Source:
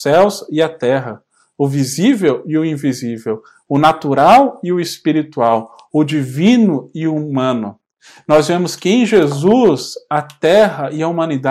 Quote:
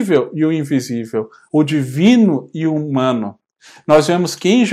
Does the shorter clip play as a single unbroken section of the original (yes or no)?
no